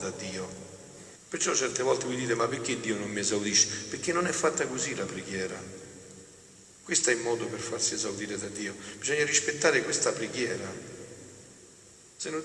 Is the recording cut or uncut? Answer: cut